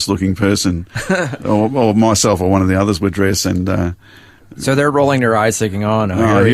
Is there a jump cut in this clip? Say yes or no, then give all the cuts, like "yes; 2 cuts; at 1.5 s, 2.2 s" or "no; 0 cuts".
no; 0 cuts